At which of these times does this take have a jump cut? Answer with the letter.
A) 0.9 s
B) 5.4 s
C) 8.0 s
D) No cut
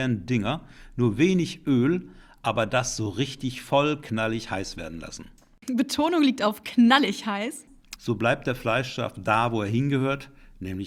C